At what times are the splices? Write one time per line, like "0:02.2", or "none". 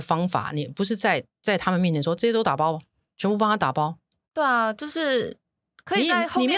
none

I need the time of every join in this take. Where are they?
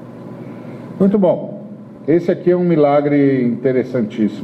none

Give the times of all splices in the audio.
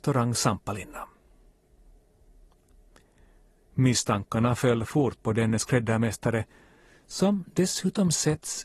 none

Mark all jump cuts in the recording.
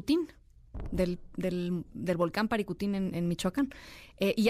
none

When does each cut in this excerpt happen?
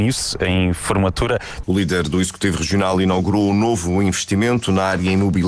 0:01.6

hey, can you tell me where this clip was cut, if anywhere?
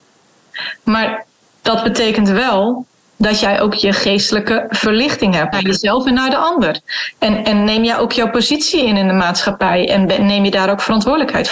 0:05.5

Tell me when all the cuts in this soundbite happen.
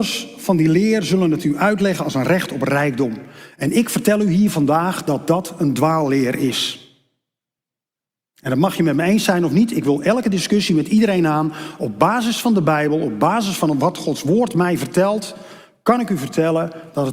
none

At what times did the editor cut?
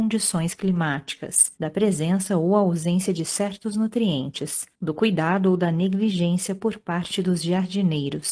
0:01.6
0:04.7

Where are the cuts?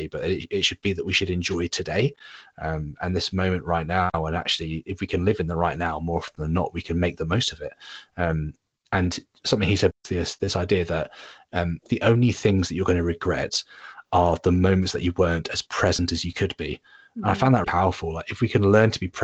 0:09.9
0:17.6

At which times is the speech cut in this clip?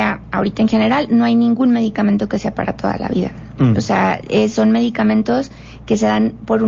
none

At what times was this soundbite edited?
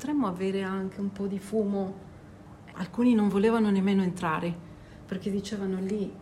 0:02.7

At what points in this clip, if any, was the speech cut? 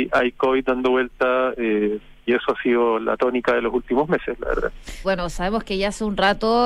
0:05.0

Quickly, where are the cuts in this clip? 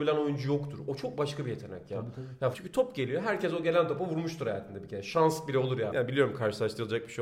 0:02.5
0:05.9

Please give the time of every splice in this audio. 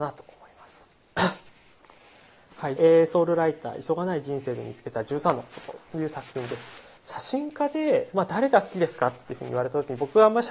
0:02.8
0:07.0

